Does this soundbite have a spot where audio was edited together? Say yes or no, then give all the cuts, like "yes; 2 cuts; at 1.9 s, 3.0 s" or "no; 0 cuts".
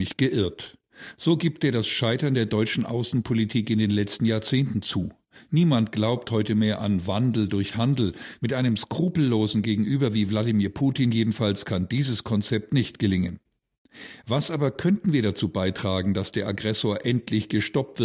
no; 0 cuts